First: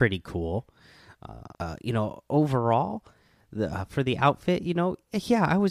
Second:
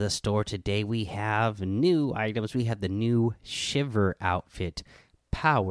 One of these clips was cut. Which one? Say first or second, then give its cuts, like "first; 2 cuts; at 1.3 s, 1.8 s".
first; 1 cut; at 1.5 s